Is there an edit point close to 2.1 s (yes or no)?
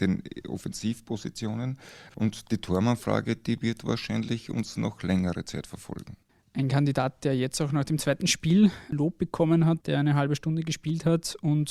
yes